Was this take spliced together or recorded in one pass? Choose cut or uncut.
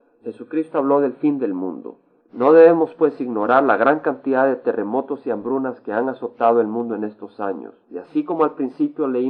cut